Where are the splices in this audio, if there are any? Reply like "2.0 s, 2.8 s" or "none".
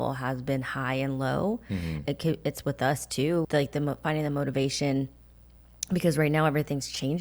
2.1 s, 3.4 s